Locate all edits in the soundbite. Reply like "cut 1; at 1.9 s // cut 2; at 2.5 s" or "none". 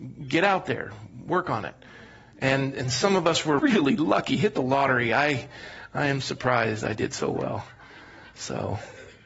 cut 1; at 3.6 s

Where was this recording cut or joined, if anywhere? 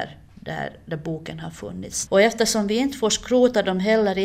cut 1; at 2.1 s

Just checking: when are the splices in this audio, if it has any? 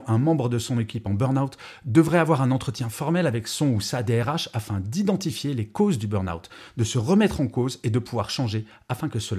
none

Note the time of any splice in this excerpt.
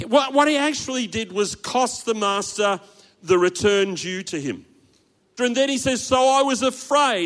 cut 1; at 5.4 s

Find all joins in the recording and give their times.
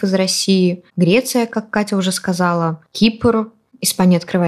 cut 1; at 2.9 s

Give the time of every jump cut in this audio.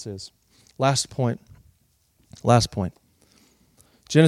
none

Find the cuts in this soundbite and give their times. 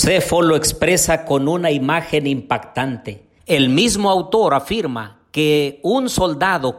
cut 1; at 3.4 s

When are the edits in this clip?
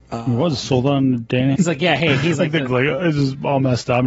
cut 1; at 1.5 s // cut 2; at 2.7 s

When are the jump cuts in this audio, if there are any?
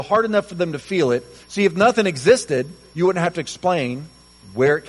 cut 1; at 1.4 s

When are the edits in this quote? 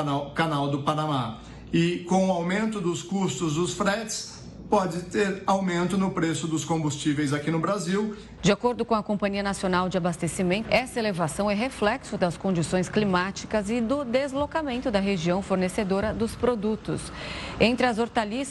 cut 1; at 8.4 s // cut 2; at 10.6 s

